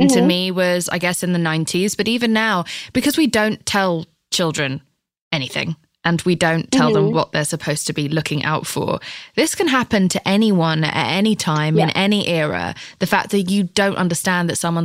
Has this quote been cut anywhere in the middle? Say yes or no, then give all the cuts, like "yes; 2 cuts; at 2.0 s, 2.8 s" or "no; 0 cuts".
no; 0 cuts